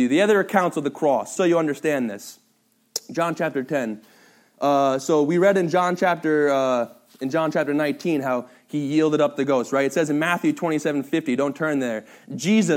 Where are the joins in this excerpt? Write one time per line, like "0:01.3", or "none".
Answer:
0:01.4